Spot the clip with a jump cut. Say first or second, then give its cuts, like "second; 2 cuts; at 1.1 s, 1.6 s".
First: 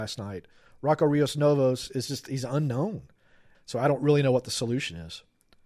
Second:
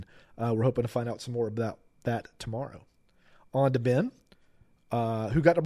first; 1 cut; at 3.5 s